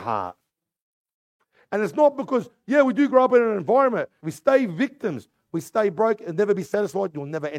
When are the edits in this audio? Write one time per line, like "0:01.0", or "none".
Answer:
0:04.2